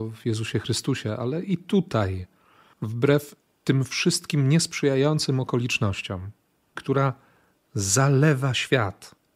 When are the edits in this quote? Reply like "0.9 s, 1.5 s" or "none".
6.8 s